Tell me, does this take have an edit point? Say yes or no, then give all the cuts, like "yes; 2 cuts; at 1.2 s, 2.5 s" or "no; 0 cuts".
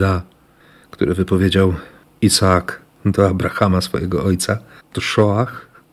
yes; 1 cut; at 4.8 s